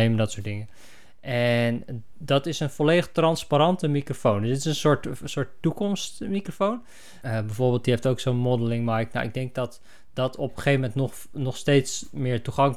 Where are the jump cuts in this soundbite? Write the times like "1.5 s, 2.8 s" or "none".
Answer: 7.2 s